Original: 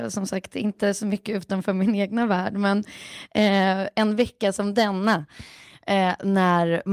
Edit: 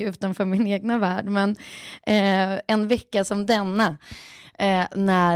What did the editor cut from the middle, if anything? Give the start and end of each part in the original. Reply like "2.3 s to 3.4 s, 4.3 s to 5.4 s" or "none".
none